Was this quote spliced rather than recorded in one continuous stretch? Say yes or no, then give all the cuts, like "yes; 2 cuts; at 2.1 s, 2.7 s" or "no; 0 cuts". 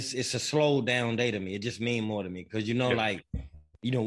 no; 0 cuts